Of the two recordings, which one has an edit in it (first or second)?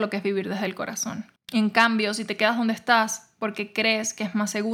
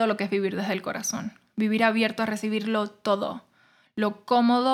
first